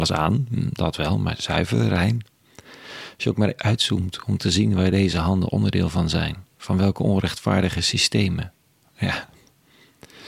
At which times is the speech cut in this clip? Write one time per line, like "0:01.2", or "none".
0:03.6
0:08.8